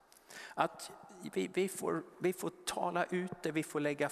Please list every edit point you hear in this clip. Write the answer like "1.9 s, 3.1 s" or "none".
none